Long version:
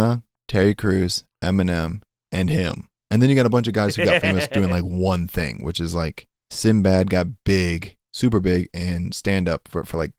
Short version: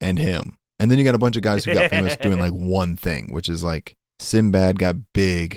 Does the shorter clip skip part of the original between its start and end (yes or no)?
no